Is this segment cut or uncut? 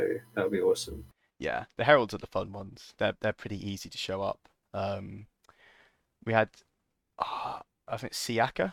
uncut